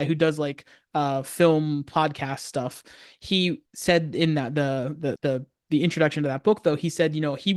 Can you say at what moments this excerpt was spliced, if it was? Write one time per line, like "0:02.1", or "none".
0:03.7
0:05.2